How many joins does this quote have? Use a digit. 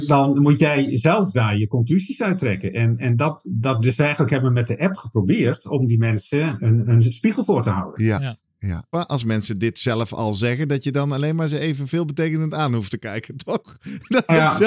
1